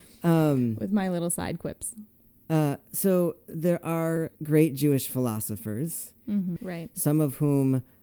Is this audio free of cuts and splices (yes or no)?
no